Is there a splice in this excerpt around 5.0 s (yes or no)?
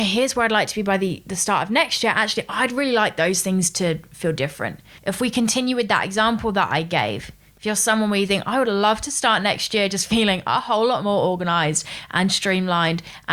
yes